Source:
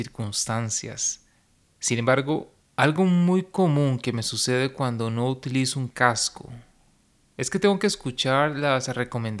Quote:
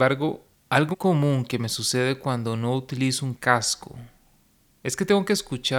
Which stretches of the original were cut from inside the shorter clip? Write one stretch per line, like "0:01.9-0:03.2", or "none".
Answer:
0:03.0-0:03.4